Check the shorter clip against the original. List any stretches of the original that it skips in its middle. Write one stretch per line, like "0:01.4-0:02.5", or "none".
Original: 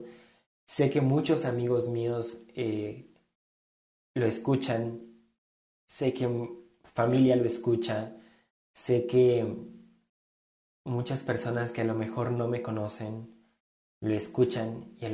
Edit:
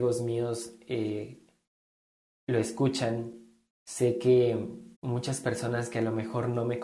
0:05.5-0:08.7
0:09.8-0:10.8